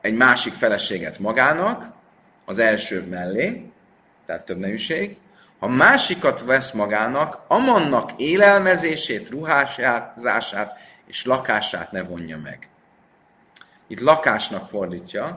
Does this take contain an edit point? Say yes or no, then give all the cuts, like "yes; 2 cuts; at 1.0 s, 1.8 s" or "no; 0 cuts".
no; 0 cuts